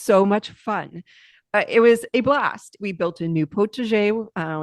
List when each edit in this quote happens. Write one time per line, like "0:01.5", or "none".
0:02.8